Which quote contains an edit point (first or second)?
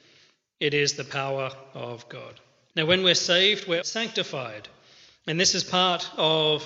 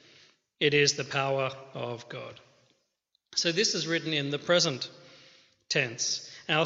first